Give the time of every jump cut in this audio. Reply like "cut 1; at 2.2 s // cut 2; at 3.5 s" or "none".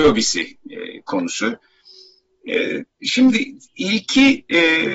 none